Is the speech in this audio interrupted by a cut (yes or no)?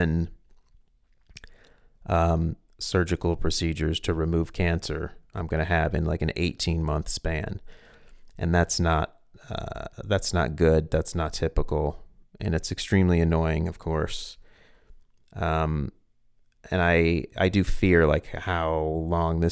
no